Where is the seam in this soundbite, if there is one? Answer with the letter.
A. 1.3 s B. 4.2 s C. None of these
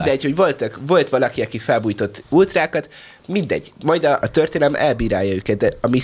B